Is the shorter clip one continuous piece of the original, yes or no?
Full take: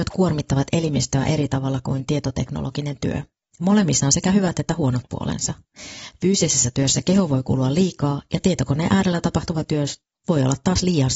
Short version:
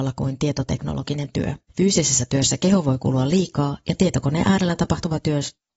no